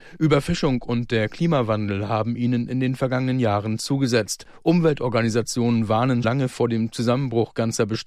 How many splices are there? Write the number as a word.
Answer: one